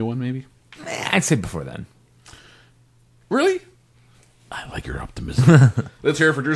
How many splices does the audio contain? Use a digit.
0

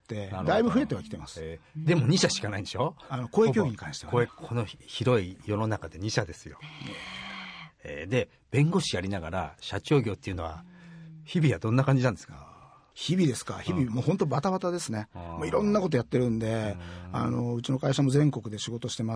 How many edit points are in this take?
1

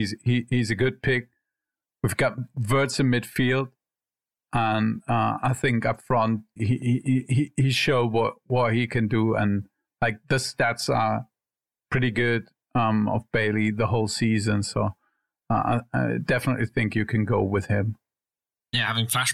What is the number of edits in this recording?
1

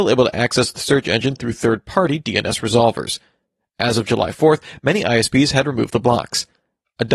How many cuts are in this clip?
0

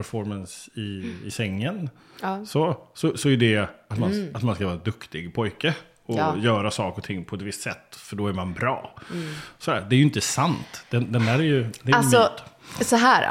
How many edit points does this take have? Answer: 0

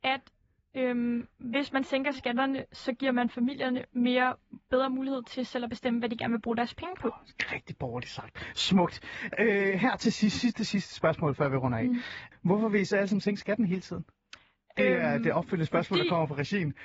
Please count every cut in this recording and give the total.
1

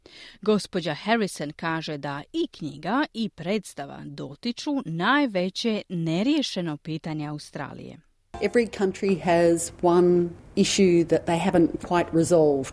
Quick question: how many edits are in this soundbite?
0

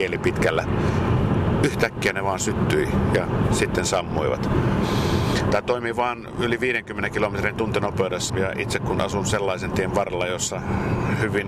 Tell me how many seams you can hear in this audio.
2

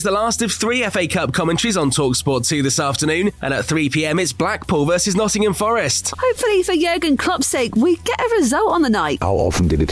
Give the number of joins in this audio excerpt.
2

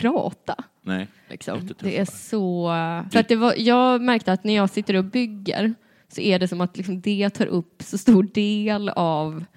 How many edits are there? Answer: 2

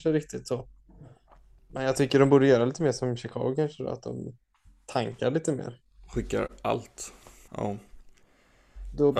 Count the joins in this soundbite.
1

